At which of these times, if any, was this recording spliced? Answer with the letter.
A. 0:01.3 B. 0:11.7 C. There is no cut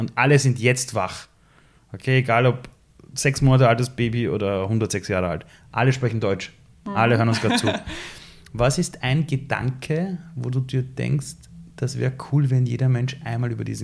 C